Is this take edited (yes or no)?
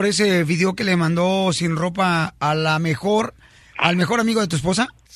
no